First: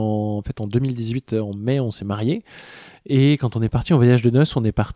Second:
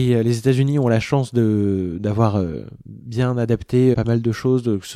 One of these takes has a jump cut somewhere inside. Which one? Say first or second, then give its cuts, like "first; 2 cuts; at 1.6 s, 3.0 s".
second; 1 cut; at 3.9 s